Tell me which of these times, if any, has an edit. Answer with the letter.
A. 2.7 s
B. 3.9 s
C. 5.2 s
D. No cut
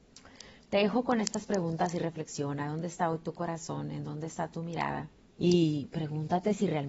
C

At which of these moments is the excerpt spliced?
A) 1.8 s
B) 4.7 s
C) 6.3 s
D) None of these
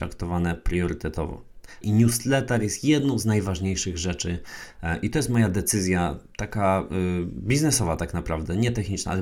A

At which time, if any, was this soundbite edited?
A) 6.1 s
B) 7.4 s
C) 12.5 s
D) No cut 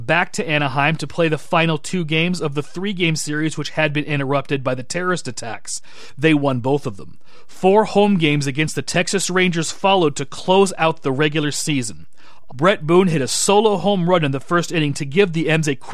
C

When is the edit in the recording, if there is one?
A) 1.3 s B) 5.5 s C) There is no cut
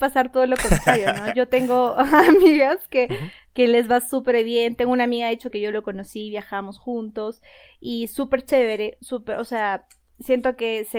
B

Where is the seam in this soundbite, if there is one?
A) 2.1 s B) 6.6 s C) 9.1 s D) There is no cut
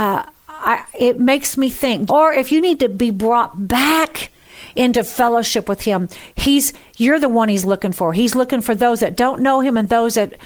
A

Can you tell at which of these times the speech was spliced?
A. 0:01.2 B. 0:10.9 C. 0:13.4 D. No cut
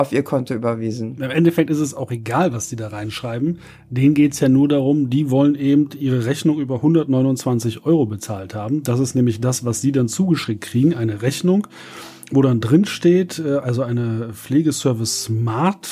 D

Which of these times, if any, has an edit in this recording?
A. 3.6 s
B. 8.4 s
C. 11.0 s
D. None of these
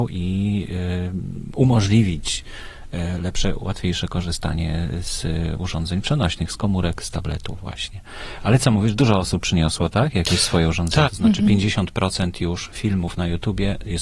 C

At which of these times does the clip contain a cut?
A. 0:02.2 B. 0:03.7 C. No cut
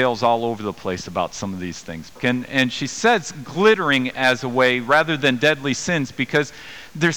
A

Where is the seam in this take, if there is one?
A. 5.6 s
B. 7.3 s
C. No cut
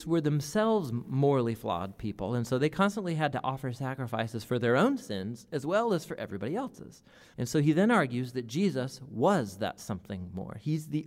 B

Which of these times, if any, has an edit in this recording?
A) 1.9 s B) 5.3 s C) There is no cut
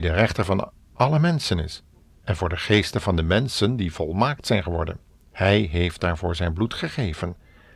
B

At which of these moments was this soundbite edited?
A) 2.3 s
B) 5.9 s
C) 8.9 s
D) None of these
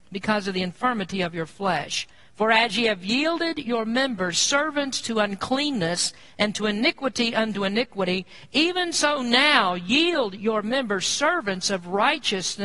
D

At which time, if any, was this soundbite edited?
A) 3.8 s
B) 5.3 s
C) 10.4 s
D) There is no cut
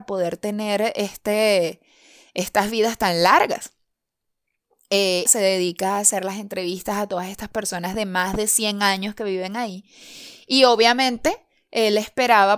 B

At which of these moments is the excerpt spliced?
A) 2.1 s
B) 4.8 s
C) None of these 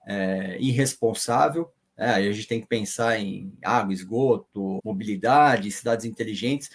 B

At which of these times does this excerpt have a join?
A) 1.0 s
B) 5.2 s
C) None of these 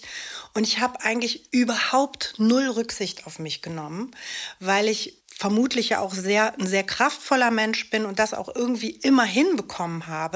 B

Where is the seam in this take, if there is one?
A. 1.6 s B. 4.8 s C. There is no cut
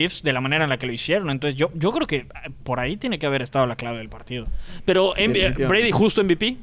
C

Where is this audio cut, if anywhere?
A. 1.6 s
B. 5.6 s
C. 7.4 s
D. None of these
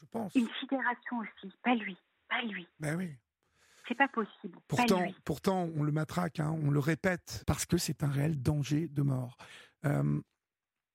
C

